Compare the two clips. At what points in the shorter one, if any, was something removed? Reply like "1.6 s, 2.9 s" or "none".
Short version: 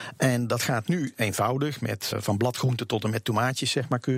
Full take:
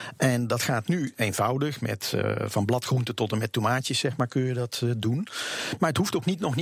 2.1 s